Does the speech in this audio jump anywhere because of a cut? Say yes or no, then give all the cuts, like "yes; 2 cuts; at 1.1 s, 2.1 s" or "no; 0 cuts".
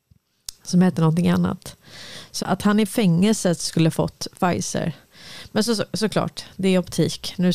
yes; 1 cut; at 2.4 s